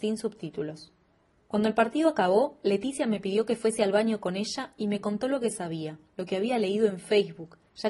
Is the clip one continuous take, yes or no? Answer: yes